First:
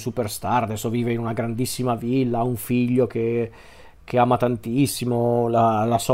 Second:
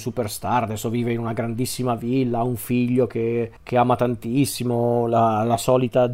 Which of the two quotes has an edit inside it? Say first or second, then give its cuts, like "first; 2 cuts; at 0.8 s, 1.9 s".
second; 1 cut; at 3.6 s